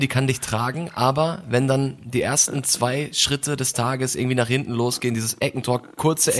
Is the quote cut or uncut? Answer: uncut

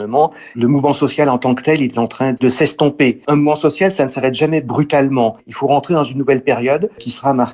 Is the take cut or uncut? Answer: uncut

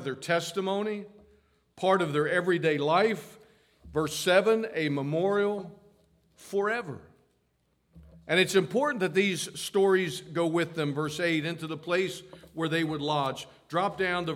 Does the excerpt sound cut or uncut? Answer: uncut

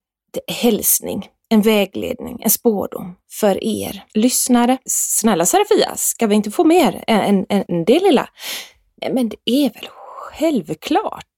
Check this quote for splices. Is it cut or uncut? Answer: cut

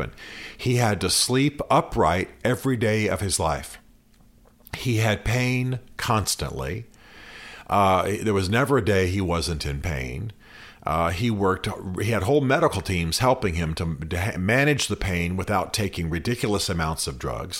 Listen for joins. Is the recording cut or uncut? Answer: uncut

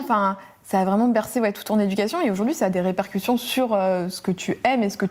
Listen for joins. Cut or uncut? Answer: uncut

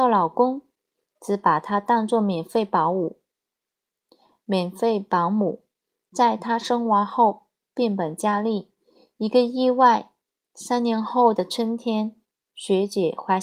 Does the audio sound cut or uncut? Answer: uncut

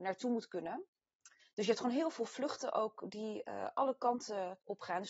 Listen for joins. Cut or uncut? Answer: cut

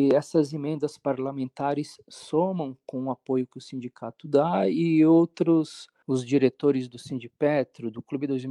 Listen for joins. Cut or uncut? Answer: cut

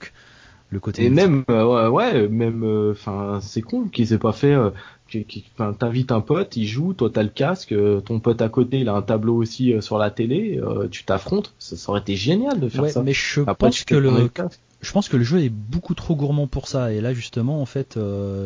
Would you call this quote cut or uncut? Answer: uncut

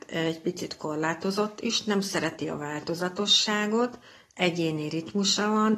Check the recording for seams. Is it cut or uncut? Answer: uncut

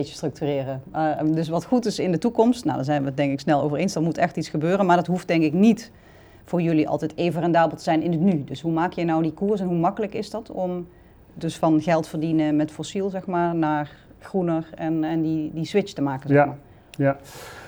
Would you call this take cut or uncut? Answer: uncut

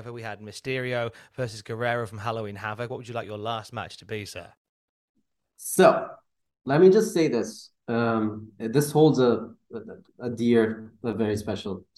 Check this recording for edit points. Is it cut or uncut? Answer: uncut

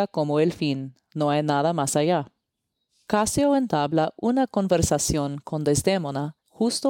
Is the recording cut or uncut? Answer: uncut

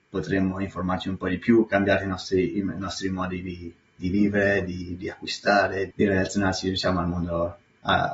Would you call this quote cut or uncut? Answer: cut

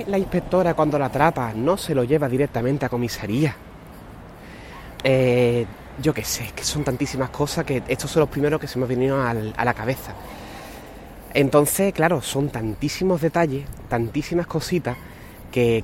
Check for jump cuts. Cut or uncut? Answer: cut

